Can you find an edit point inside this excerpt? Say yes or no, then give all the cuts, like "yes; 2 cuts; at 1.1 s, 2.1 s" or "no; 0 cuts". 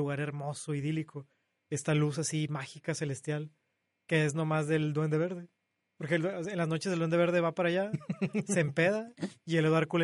no; 0 cuts